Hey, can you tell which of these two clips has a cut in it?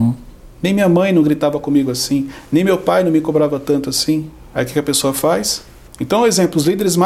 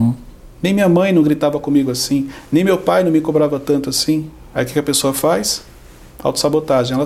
first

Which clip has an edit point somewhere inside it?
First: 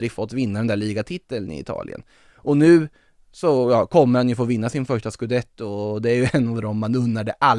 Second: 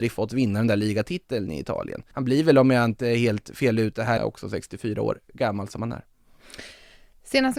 second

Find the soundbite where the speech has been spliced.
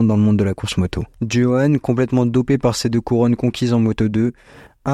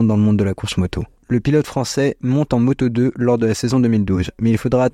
first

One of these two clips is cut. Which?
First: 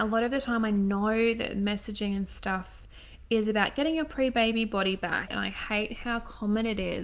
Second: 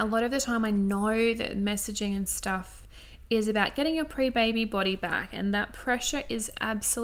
first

